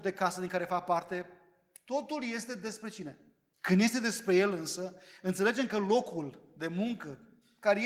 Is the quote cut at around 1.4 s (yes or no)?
no